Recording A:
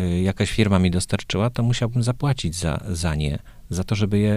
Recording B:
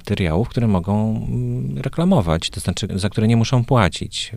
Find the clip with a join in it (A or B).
B